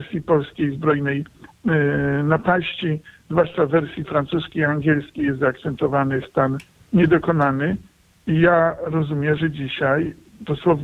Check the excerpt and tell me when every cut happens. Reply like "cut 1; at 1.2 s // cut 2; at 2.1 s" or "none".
none